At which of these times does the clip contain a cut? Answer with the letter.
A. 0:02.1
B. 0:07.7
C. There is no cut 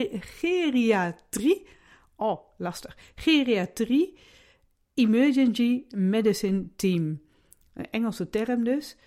C